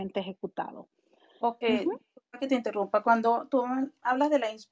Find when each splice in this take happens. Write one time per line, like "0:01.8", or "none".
0:01.6